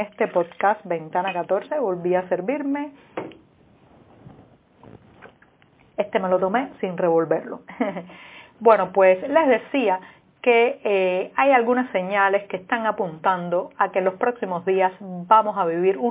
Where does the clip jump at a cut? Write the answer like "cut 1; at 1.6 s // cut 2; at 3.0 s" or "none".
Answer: none